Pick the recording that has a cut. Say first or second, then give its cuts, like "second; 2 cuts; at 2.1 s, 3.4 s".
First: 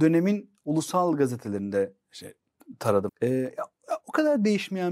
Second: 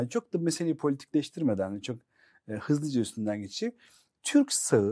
first; 1 cut; at 3.1 s